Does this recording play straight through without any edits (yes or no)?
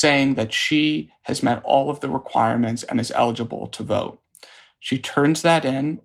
yes